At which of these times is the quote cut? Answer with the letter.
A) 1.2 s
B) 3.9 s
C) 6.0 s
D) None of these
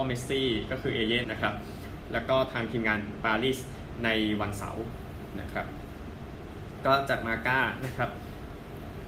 A